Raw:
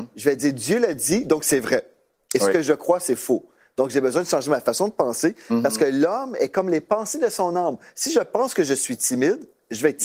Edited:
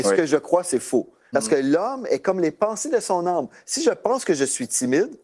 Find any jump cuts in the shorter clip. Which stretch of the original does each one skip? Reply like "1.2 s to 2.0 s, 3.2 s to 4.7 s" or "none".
3.7 s to 5.6 s